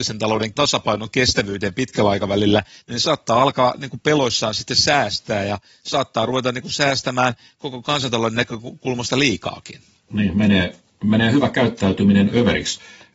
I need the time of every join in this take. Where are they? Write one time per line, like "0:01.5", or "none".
none